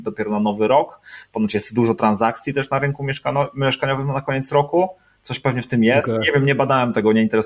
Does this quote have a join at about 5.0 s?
no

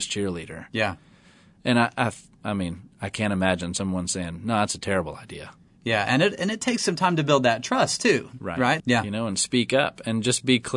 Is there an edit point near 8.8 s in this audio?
yes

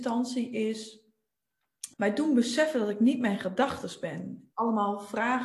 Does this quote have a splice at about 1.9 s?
yes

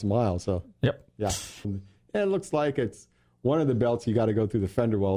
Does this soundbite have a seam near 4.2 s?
no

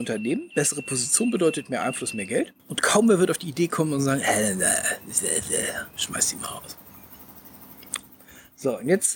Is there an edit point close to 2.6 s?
yes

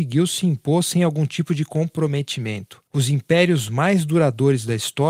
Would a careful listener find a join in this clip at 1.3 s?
no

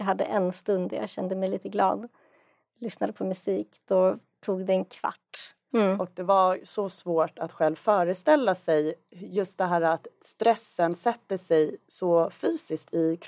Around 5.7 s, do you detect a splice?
yes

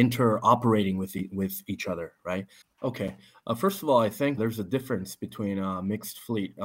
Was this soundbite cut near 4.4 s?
yes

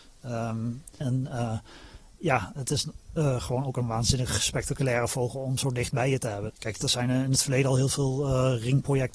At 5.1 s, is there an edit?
no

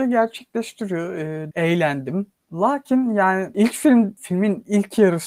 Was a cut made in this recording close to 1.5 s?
yes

